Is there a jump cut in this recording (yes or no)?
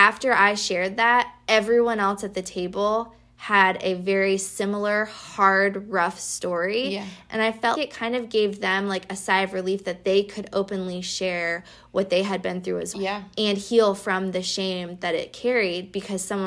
yes